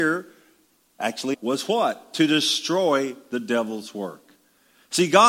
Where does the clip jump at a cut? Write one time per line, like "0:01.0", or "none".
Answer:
0:01.3